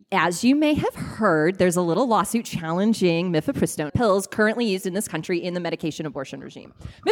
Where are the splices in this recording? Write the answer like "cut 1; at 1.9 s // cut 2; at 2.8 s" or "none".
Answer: cut 1; at 3.9 s